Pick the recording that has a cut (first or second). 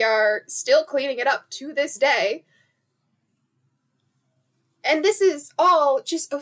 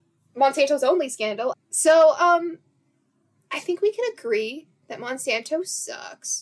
second